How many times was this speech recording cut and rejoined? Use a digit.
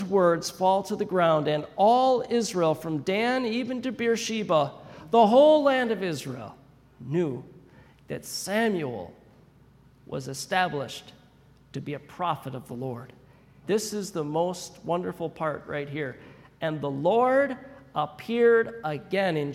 1